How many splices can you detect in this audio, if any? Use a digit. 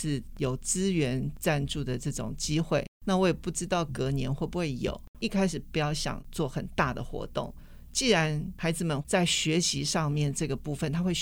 1